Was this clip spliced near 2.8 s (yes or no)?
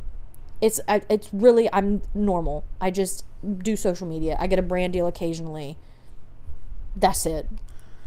no